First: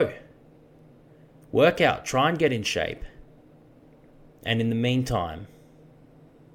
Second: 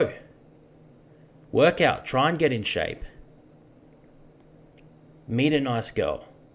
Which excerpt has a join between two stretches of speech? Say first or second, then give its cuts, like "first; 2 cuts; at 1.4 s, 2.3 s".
first; 1 cut; at 4.3 s